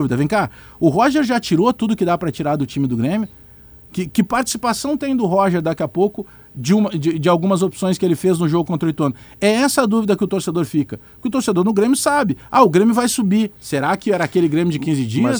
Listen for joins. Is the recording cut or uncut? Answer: cut